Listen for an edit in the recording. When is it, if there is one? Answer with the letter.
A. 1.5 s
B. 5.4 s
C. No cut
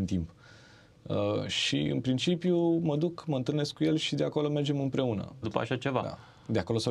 B